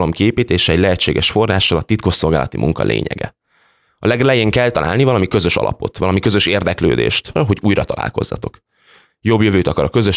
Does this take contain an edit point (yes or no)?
yes